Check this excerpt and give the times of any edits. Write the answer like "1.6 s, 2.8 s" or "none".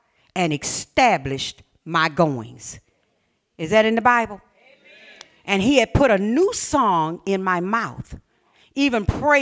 none